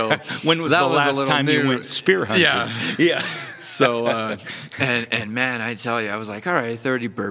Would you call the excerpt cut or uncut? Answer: uncut